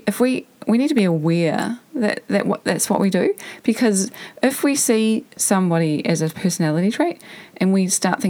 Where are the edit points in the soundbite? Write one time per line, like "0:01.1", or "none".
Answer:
none

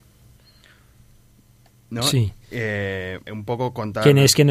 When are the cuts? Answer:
0:03.2

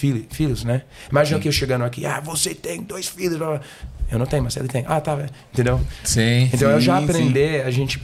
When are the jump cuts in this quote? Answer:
none

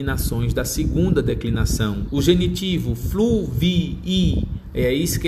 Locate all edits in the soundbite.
0:02.1

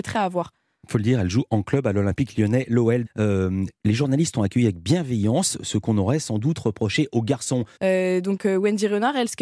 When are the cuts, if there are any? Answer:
0:03.1
0:07.8

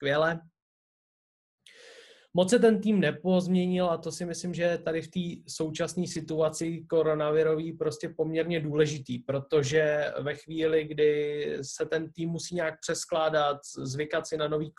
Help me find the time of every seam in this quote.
none

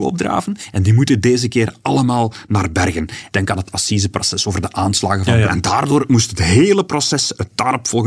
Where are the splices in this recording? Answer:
0:03.3
0:05.5

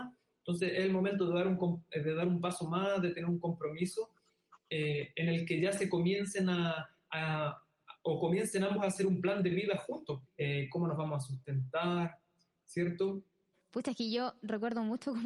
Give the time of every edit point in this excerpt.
0:10.3
0:13.5

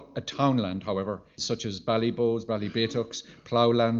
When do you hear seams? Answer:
0:01.4

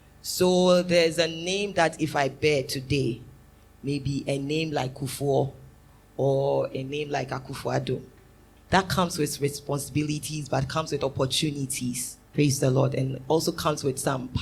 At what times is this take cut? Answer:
0:08.6
0:12.3

